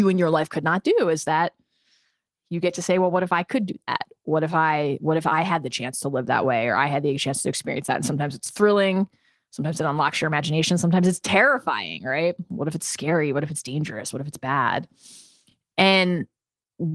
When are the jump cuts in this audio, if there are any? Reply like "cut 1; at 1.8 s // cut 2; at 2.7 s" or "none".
none